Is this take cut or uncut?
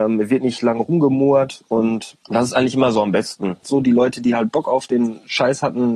cut